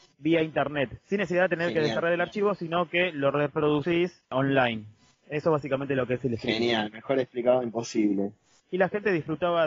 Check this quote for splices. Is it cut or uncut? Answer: cut